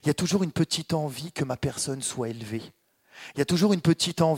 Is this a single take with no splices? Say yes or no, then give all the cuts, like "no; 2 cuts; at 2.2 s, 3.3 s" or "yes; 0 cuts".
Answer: yes; 0 cuts